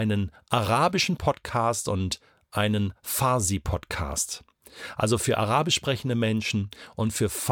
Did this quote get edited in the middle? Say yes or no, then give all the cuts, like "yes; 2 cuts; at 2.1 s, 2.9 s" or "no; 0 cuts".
no; 0 cuts